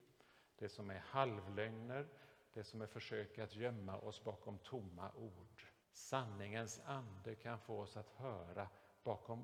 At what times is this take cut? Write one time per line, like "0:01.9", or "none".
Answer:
0:05.8